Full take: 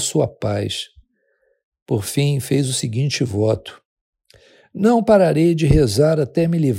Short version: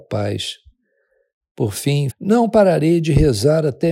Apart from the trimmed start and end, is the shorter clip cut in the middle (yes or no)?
yes